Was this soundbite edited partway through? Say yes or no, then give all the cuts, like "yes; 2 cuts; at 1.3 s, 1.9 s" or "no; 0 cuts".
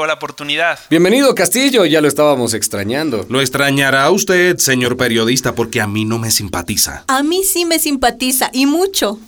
no; 0 cuts